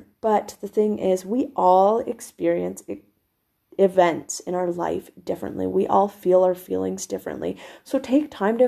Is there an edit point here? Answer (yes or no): no